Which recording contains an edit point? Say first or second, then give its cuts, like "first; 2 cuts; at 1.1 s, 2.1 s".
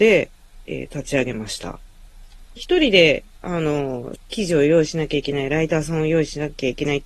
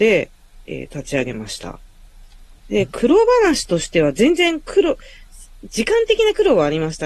first; 2 cuts; at 2.6 s, 4.2 s